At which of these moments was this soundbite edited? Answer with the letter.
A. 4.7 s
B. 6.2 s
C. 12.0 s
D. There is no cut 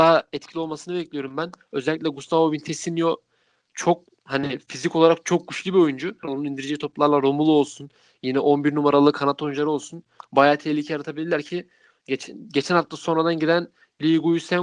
B